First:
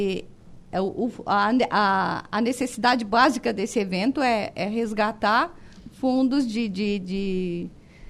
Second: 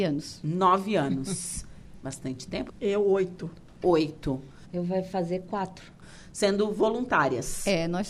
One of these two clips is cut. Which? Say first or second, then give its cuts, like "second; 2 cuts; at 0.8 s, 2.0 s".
second; 3 cuts; at 2.7 s, 4.6 s, 6.0 s